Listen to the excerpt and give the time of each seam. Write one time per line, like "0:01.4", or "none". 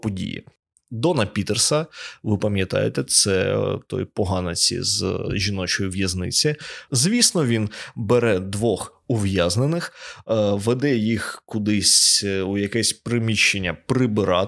0:06.9